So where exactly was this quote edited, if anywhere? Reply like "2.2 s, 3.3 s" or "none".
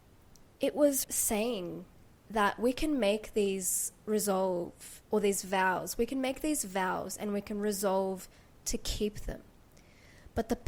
1.0 s, 5.0 s

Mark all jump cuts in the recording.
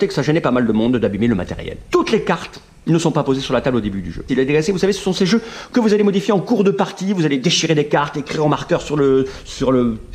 1.8 s, 4.3 s

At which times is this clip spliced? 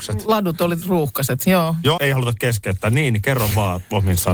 2.0 s

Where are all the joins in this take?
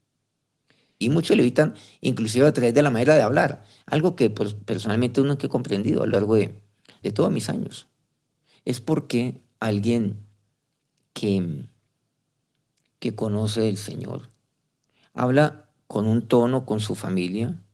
1.0 s, 7.0 s

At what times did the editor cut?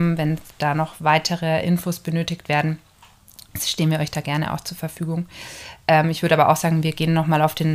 none

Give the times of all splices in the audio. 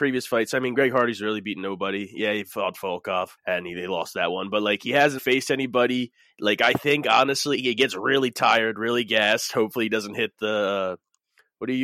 3.4 s, 5.2 s

